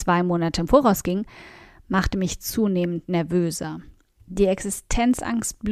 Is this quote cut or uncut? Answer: uncut